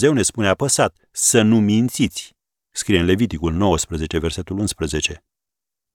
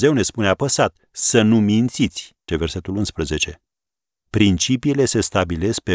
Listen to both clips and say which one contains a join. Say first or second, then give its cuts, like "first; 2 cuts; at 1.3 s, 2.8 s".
second; 2 cuts; at 2.5 s, 4.2 s